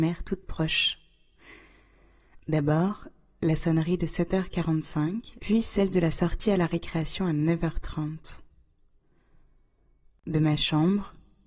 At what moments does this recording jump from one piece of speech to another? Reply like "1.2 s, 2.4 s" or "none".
5.4 s

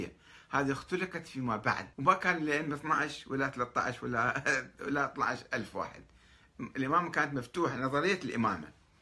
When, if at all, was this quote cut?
1.9 s

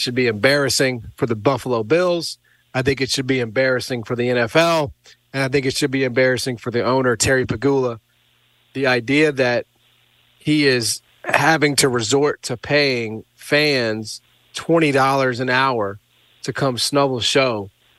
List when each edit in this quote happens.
none

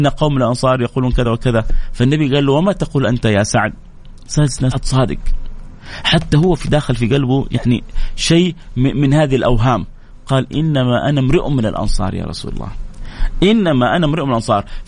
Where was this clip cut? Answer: 1.2 s, 4.7 s

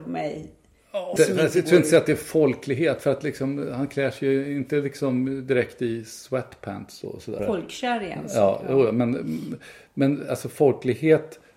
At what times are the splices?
1.2 s, 7.4 s

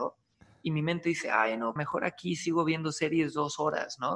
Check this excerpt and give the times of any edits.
1.8 s

